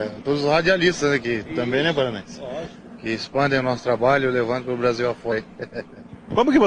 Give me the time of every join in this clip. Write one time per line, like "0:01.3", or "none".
none